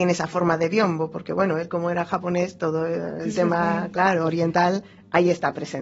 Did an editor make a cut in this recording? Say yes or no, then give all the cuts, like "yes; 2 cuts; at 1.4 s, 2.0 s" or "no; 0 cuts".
no; 0 cuts